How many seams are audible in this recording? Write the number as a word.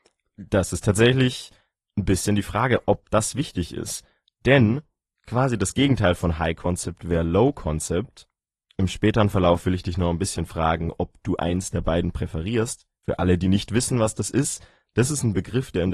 two